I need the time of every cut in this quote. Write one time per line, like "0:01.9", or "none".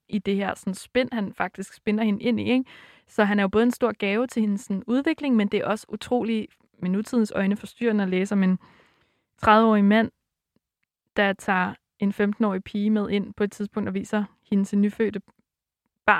none